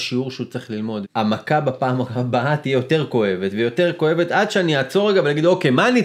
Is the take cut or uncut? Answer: cut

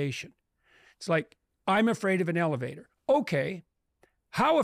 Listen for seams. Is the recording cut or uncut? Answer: uncut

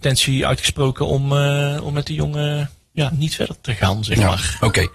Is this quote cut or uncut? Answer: uncut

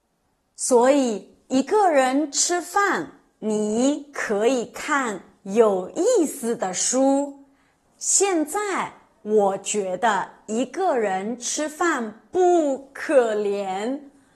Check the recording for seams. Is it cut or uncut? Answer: cut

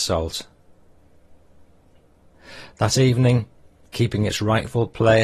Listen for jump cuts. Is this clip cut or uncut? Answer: cut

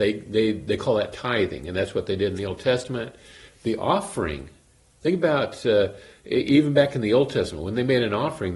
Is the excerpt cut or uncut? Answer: cut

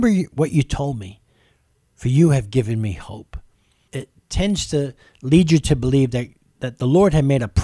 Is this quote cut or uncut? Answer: cut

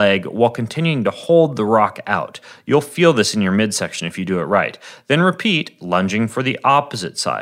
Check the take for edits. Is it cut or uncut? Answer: uncut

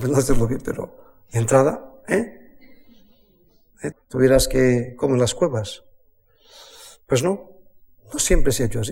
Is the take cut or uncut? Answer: cut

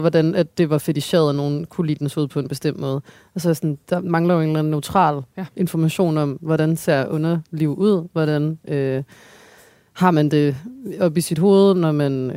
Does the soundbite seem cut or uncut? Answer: uncut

